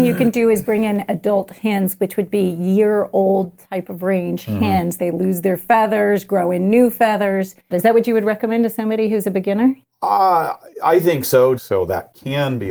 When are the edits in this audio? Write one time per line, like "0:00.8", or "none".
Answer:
0:05.0
0:07.7
0:11.6